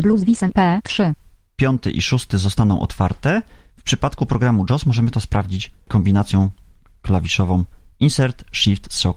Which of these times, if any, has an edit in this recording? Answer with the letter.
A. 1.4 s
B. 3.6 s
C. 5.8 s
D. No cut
D